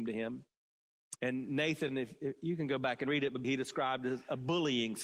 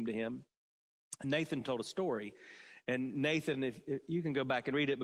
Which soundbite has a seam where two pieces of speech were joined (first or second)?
first